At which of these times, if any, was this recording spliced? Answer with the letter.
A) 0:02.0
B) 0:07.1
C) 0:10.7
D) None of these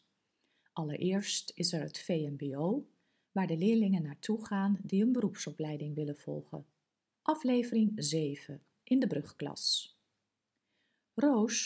B